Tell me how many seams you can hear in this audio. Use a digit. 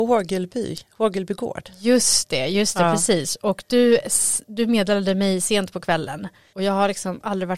1